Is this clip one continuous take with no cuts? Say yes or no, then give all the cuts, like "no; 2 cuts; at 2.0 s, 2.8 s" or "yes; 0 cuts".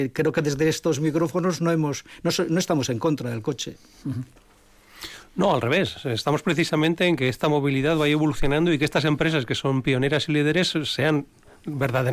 yes; 0 cuts